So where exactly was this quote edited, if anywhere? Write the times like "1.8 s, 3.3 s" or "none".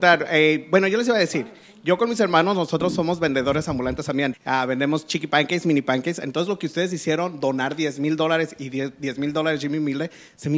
4.3 s